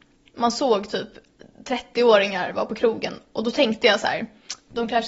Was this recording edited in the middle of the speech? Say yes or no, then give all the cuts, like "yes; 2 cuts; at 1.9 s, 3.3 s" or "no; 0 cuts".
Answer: no; 0 cuts